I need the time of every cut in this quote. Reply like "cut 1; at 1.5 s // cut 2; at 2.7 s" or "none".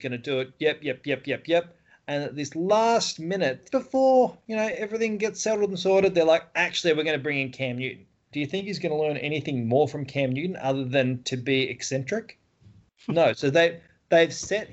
cut 1; at 3.7 s // cut 2; at 8.3 s